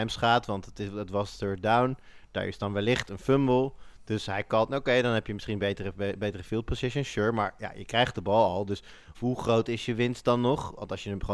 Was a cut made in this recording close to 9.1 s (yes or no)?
yes